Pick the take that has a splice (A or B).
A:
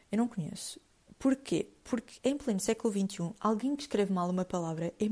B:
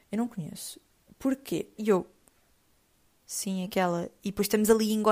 B